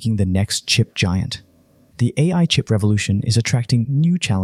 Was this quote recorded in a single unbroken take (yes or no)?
no